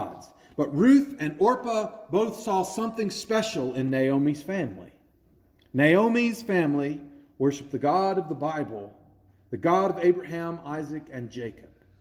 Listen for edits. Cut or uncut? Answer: uncut